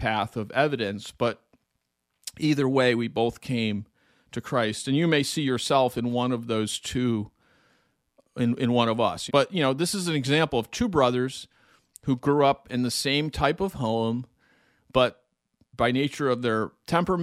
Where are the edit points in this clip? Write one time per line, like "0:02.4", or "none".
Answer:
0:09.3